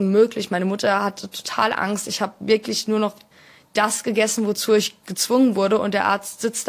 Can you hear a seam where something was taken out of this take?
no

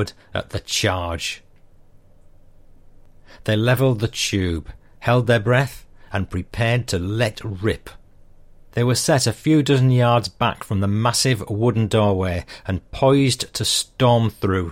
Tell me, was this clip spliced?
yes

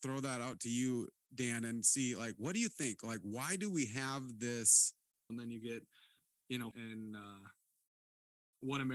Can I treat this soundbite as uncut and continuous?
no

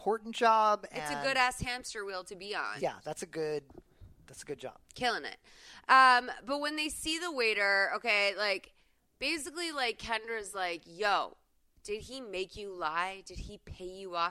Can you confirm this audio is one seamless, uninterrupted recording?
no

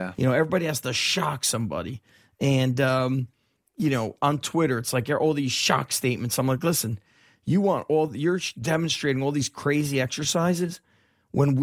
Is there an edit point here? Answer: no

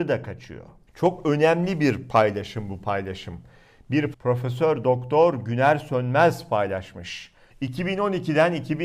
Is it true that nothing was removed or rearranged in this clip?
no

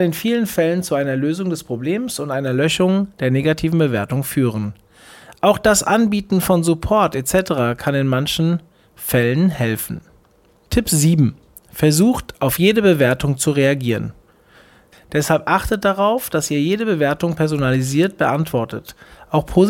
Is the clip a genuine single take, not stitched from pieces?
no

